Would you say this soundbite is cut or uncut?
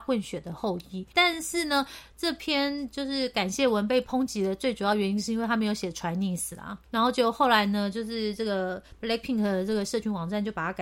cut